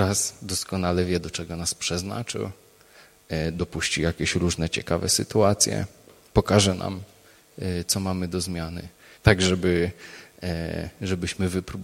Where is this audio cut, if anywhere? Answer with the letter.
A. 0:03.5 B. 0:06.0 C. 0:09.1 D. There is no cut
C